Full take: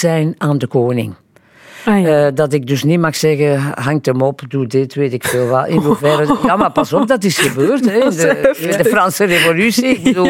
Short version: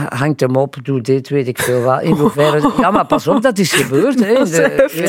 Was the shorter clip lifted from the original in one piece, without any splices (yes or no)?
yes